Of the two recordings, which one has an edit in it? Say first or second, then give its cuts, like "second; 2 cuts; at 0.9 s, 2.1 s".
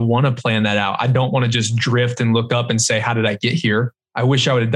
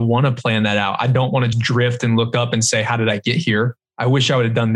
second; 1 cut; at 1.5 s